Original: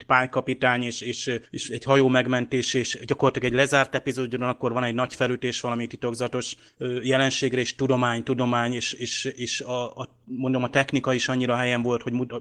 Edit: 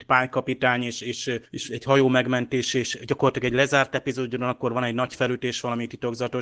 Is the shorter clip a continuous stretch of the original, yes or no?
yes